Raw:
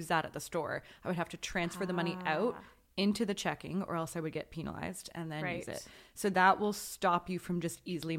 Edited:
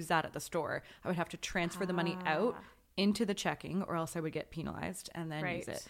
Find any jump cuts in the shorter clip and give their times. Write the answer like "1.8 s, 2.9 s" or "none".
none